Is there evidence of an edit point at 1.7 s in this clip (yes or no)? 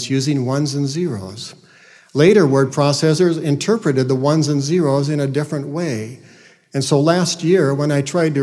no